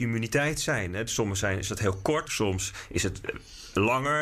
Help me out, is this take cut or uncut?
cut